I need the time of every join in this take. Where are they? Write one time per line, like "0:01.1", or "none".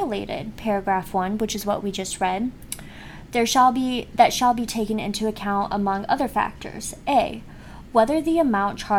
none

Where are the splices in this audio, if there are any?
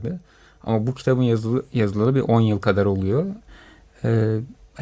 none

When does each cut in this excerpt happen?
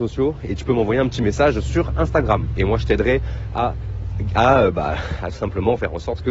none

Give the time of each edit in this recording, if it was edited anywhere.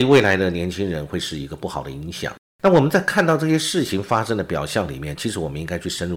0:02.6

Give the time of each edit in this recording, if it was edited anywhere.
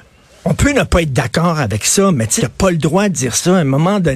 0:02.4

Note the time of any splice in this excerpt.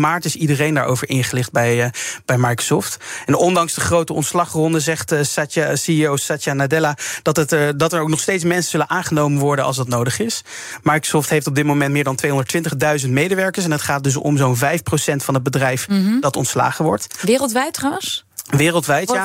none

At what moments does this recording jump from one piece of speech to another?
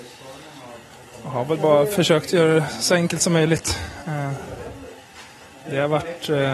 none

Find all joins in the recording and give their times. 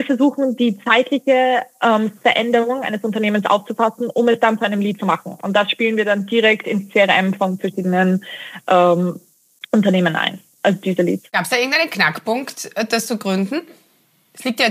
none

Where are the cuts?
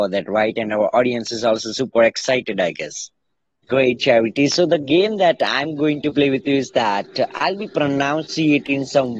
0:03.6

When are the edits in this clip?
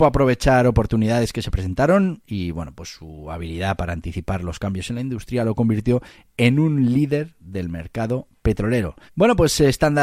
0:09.1

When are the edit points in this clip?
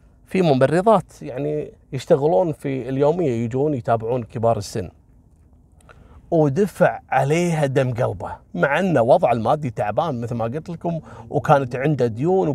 0:01.8
0:08.5

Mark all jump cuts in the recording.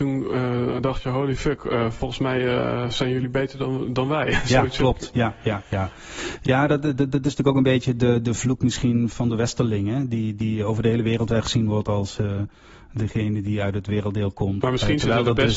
0:14.6

